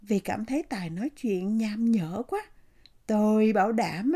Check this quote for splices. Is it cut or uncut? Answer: cut